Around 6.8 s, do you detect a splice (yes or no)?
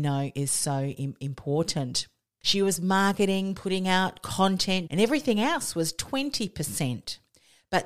no